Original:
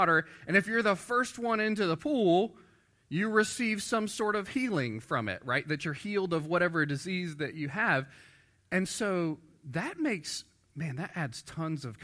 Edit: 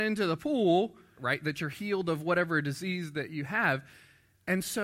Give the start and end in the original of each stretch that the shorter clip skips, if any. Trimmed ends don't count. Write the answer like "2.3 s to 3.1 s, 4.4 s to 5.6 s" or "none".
2.8 s to 5.4 s